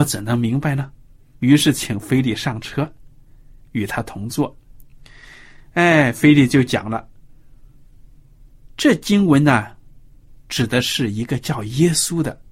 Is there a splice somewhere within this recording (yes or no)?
no